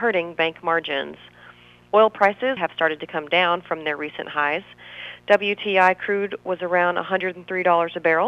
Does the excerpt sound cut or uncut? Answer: cut